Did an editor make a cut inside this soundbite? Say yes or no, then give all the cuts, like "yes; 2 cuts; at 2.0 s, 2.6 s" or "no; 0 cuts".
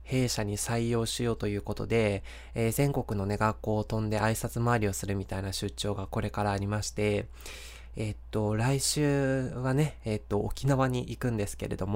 no; 0 cuts